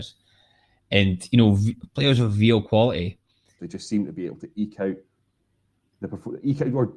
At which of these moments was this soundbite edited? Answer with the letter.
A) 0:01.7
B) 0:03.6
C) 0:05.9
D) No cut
B